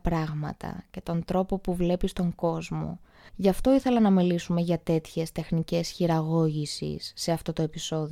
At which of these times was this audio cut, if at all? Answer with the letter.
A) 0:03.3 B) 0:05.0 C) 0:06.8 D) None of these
A